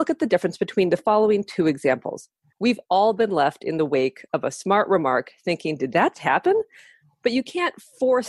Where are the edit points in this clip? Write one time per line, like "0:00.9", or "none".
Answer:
0:02.5
0:06.1